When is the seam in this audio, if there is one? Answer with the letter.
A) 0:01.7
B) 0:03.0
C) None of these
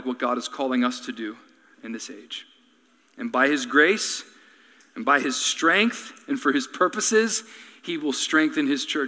A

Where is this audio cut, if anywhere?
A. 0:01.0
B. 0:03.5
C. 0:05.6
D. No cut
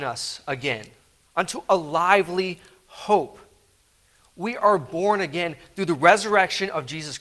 D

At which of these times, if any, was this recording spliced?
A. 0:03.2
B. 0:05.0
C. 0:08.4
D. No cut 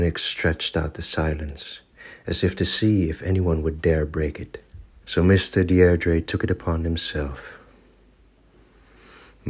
B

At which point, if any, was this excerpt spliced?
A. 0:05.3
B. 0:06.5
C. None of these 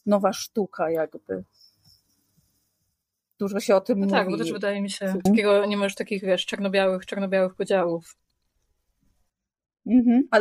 A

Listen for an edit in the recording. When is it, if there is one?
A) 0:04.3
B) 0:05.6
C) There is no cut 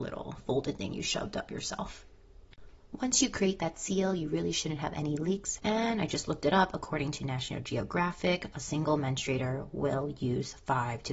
B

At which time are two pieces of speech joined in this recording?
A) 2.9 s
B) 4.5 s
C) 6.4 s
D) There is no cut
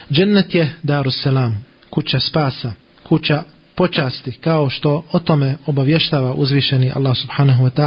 A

